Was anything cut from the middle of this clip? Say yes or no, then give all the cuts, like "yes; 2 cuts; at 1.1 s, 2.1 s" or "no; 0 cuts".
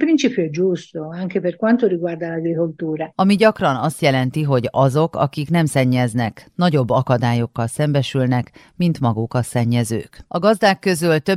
yes; 1 cut; at 3.1 s